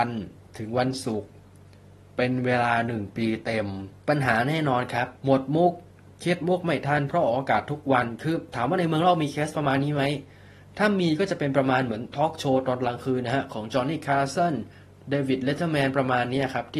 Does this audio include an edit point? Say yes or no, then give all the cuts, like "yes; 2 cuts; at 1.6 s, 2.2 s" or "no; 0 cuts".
yes; 2 cuts; at 4.0 s, 5.2 s